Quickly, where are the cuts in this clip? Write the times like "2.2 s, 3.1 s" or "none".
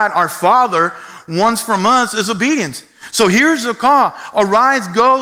none